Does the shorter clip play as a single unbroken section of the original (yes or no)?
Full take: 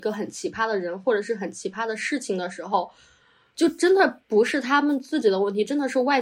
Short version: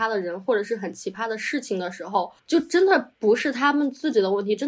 no